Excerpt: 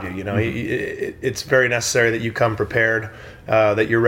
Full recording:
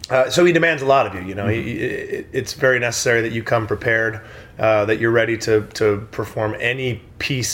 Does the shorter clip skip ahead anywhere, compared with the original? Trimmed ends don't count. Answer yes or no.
no